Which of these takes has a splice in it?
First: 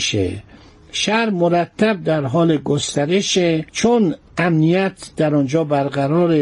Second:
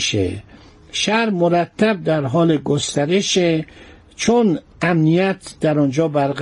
first; 1 cut; at 3.7 s

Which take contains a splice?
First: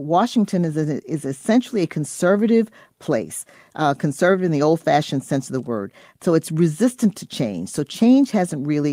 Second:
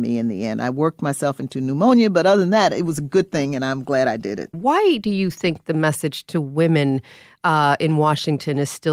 second; 1 cut; at 4.5 s

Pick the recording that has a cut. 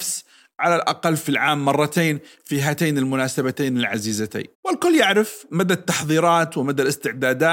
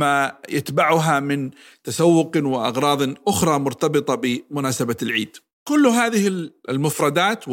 first; 1 cut; at 4.5 s

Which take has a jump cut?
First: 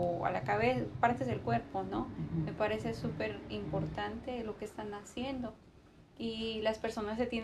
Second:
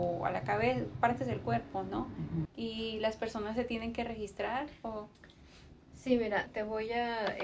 second; 2 cuts; at 2.5 s, 6.5 s

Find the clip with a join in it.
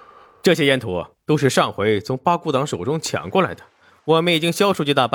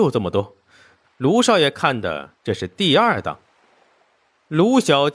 second; 1 cut; at 1.0 s

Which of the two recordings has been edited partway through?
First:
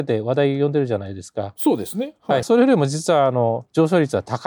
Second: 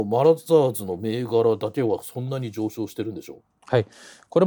first; 1 cut; at 2.4 s

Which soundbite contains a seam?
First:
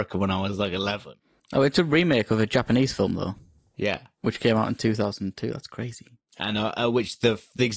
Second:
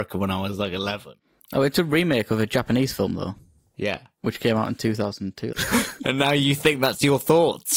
second; 1 cut; at 5.5 s

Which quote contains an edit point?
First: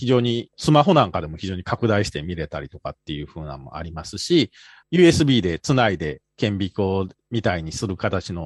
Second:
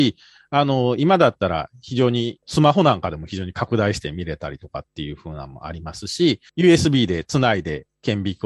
second; 1 cut; at 6.5 s

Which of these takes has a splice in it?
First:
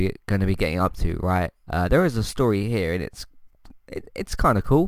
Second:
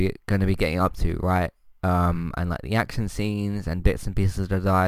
first; 1 cut; at 1.7 s

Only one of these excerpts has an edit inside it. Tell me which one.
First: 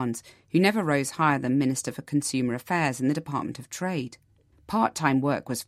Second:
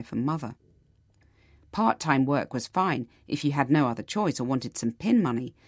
first; 1 cut; at 4.5 s

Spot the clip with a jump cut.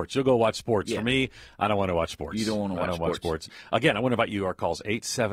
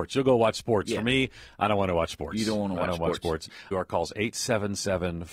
second; 1 cut; at 3.7 s

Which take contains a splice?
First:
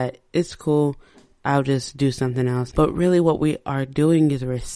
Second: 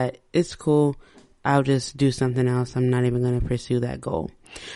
first; 1 cut; at 2.7 s

